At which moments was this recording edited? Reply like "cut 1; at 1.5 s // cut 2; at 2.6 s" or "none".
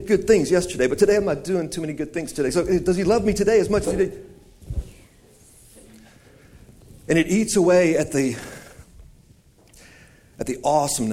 none